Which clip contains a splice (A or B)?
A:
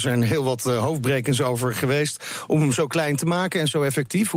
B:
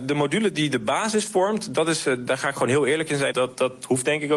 B